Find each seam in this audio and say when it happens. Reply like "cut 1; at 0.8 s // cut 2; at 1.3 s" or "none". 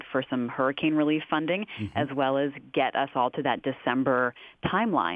none